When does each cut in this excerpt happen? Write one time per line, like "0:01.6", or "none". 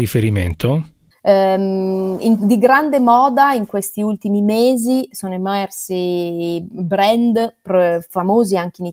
0:01.1